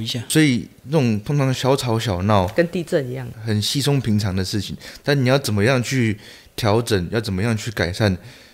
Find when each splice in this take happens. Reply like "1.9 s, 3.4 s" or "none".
1.5 s